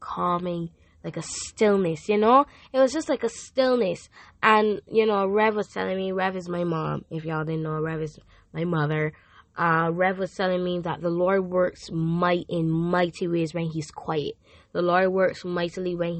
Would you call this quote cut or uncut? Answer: uncut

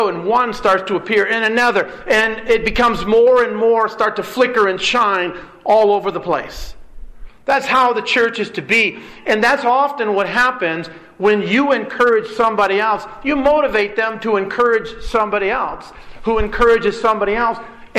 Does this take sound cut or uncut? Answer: uncut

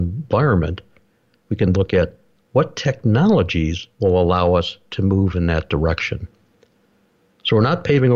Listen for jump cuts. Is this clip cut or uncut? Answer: cut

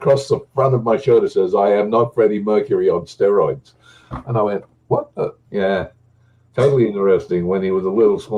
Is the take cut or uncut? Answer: cut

